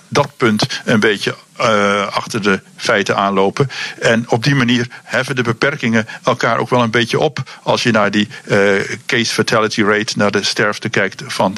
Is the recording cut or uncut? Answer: uncut